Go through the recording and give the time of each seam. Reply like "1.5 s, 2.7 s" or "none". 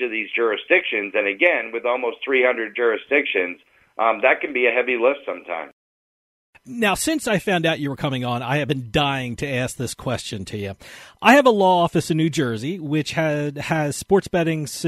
none